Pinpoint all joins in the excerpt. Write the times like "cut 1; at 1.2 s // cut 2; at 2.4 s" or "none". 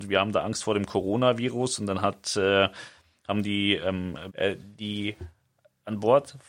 cut 1; at 4.3 s